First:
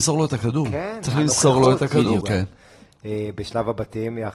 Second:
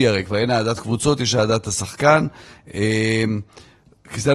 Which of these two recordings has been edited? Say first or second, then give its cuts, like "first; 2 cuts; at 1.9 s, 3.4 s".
first; 1 cut; at 2.2 s